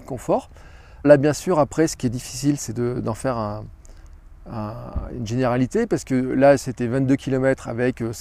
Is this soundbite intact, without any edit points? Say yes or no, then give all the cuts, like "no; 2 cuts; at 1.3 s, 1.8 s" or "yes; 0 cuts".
no; 1 cut; at 1.0 s